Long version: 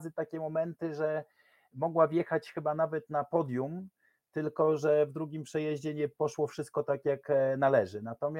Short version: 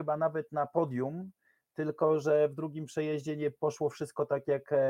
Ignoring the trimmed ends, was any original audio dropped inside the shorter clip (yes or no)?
no